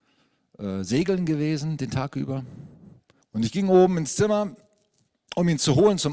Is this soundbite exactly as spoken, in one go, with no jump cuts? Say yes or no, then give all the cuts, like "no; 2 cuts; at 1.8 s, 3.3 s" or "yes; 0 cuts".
no; 1 cut; at 3.2 s